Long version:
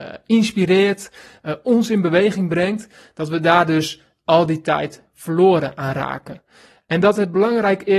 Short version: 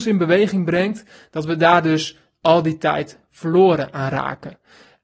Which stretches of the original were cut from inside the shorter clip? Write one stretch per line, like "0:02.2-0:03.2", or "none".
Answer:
none